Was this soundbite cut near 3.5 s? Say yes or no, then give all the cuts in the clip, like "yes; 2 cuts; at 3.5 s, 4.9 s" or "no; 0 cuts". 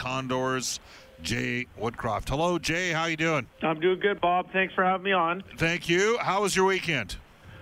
yes; 1 cut; at 3.5 s